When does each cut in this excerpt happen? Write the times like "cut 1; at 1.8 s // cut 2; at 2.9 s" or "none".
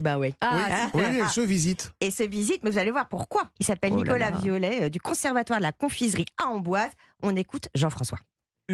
cut 1; at 3.6 s